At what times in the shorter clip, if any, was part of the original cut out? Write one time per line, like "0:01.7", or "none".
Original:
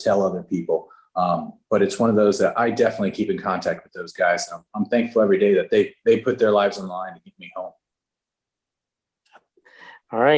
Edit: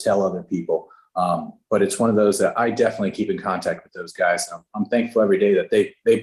none